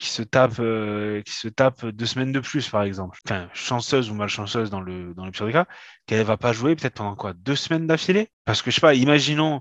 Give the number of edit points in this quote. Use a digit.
1